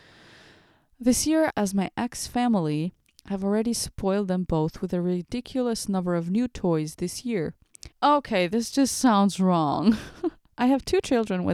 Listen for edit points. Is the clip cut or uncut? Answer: cut